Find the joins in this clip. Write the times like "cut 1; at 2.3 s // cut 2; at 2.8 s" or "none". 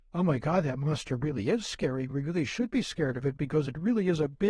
none